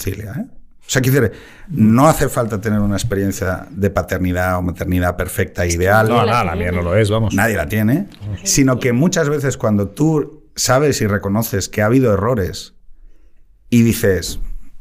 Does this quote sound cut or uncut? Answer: uncut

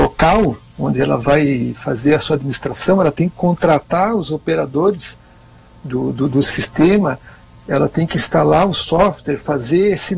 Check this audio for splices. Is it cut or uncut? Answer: uncut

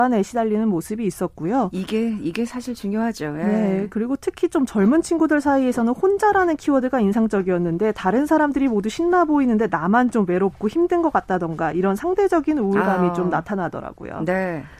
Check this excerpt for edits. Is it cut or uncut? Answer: uncut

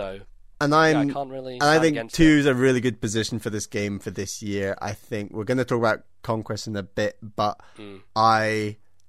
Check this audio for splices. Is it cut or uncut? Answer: uncut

